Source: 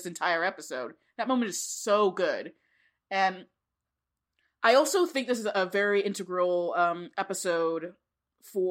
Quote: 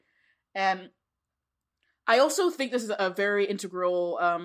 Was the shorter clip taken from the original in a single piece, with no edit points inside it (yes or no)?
yes